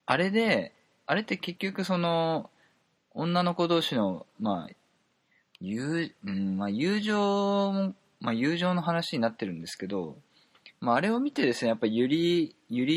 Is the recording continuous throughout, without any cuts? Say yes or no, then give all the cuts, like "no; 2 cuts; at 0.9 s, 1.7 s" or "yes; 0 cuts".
yes; 0 cuts